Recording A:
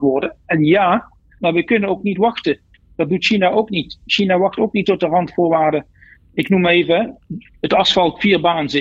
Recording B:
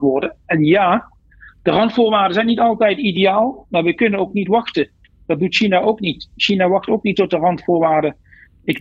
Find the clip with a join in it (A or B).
A